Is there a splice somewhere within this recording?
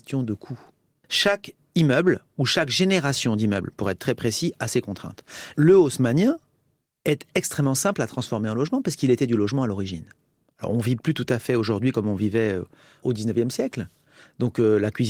no; 0 cuts

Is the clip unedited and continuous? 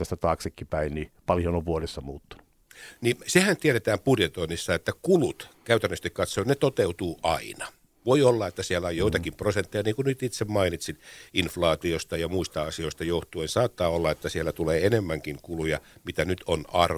yes; 0 cuts

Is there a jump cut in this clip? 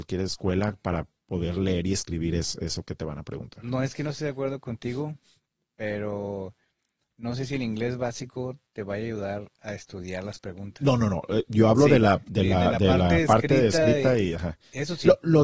no; 0 cuts

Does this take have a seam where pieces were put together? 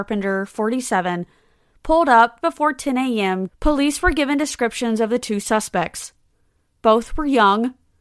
yes; 2 cuts; at 2.4 s, 3.5 s

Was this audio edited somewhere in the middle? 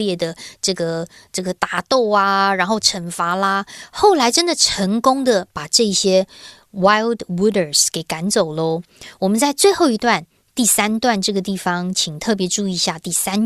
no; 0 cuts

